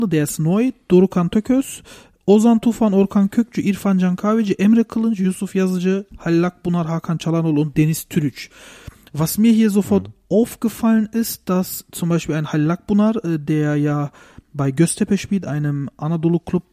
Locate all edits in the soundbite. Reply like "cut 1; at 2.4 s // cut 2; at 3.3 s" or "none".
none